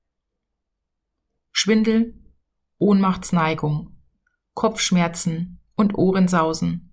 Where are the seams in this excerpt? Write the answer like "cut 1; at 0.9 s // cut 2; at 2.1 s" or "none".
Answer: none